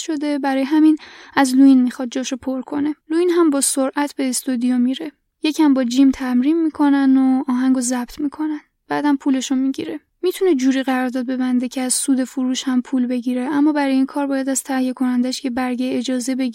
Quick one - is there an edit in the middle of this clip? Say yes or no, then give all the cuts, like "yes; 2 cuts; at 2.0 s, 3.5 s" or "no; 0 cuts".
yes; 1 cut; at 3.0 s